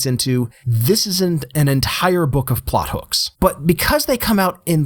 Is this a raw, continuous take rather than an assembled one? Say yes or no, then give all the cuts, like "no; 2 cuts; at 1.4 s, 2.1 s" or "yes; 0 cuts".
no; 1 cut; at 3.3 s